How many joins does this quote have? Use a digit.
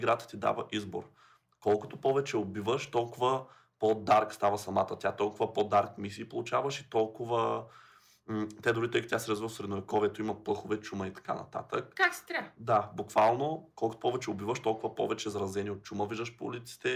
0